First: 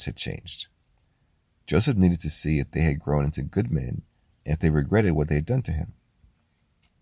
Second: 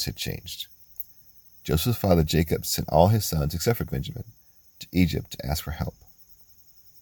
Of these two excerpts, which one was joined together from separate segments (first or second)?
second